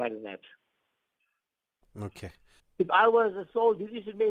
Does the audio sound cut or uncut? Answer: cut